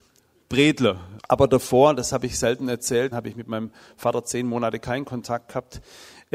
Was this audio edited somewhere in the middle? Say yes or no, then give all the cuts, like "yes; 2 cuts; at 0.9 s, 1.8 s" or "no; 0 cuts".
yes; 2 cuts; at 1.2 s, 3.1 s